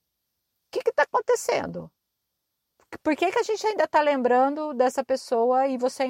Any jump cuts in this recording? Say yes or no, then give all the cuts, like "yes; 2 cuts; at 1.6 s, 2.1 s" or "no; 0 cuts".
no; 0 cuts